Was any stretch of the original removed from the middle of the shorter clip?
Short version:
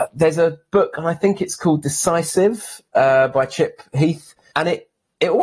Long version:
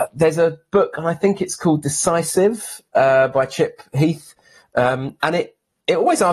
yes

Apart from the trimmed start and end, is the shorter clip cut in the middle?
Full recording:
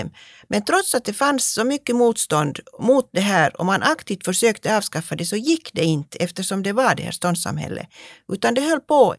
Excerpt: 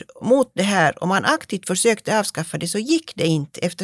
no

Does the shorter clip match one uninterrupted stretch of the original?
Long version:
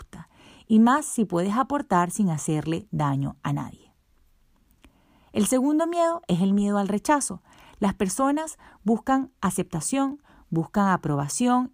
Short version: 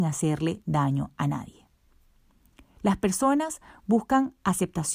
no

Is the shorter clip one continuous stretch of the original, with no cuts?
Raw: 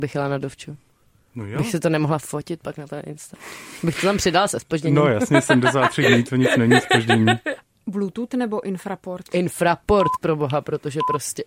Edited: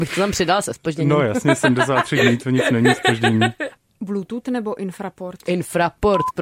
yes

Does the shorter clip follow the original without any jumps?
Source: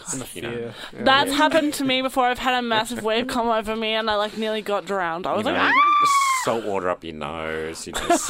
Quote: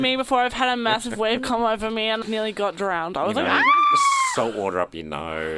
no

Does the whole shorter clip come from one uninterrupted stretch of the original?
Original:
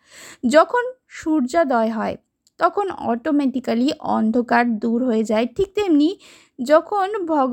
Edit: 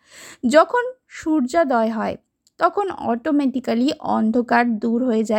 yes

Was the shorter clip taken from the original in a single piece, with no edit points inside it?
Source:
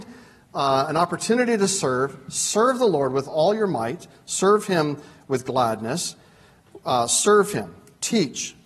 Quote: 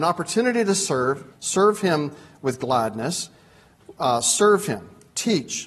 no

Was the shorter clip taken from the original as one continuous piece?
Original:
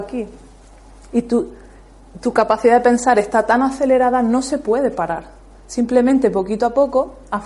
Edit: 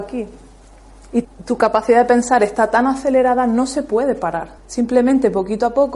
no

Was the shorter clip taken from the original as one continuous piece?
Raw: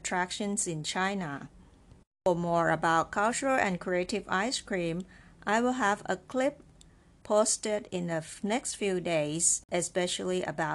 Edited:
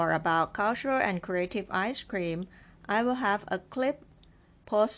yes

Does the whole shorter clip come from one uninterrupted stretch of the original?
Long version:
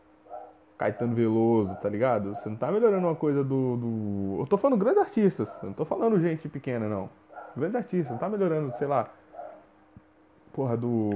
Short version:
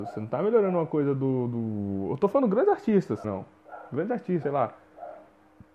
no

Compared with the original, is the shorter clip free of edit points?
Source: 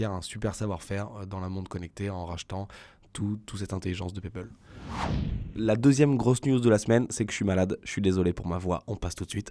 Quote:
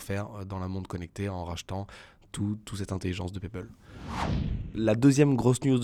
yes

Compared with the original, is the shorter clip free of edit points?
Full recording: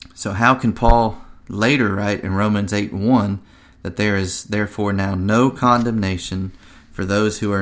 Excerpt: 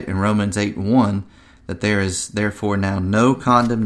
yes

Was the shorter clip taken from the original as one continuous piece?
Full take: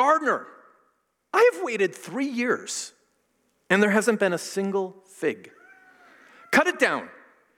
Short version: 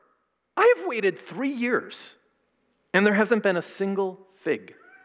yes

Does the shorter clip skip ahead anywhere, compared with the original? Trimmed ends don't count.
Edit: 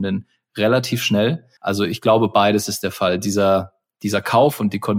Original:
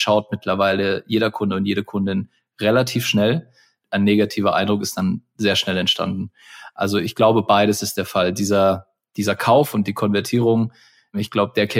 yes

